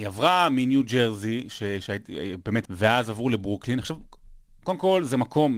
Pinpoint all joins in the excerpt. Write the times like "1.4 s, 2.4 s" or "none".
2.6 s